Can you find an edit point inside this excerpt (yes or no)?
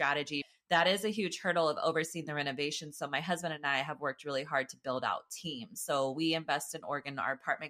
no